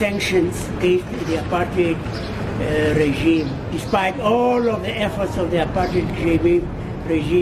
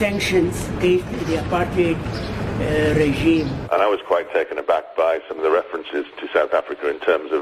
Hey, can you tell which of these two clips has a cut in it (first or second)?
second